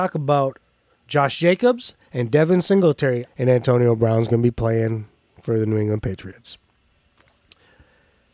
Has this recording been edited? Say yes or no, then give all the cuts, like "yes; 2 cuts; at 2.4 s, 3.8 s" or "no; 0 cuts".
yes; 2 cuts; at 2.1 s, 3.3 s